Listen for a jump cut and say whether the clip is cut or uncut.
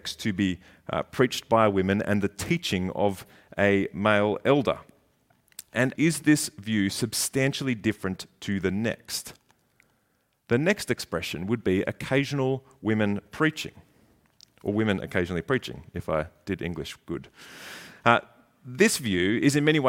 cut